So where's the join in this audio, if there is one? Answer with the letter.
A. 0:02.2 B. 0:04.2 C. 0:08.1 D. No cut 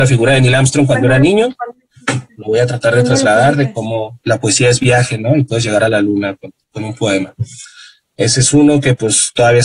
B